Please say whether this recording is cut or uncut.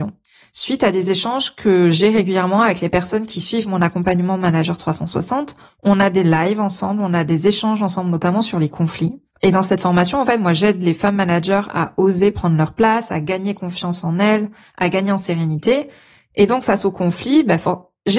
uncut